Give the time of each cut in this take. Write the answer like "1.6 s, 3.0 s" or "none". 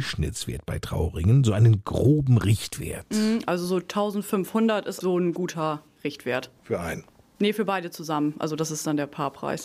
5.0 s, 6.6 s